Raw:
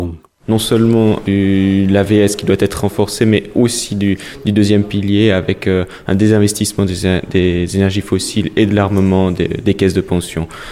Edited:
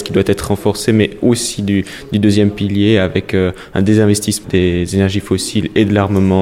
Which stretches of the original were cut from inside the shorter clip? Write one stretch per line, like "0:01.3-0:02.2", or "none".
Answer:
0:06.8-0:07.3